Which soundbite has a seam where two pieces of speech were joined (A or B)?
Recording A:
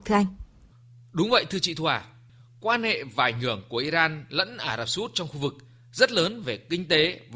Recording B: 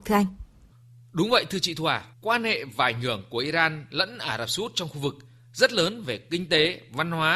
B